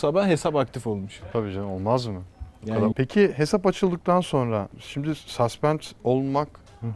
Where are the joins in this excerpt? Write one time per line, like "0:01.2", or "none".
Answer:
0:01.3
0:02.9